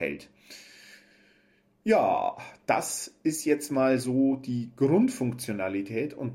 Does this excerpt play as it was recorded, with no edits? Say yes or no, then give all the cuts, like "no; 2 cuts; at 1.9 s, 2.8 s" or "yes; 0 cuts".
yes; 0 cuts